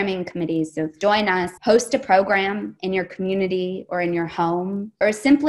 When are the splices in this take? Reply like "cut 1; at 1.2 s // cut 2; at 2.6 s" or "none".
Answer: cut 1; at 1.6 s